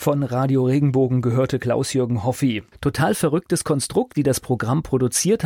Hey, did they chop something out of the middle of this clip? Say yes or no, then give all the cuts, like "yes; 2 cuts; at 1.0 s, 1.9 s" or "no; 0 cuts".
yes; 2 cuts; at 2.7 s, 4.1 s